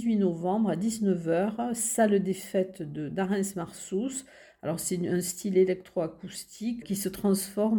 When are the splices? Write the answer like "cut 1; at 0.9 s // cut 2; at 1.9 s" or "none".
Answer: cut 1; at 6.8 s